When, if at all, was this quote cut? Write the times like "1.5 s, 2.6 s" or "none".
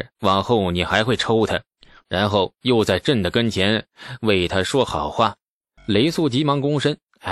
5.8 s